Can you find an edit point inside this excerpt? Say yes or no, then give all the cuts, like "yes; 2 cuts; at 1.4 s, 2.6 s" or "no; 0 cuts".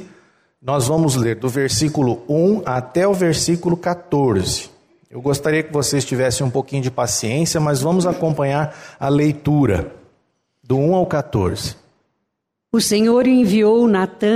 no; 0 cuts